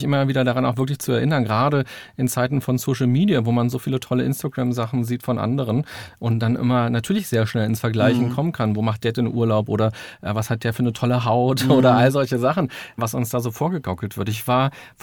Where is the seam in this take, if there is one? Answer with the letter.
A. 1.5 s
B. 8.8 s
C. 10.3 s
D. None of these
D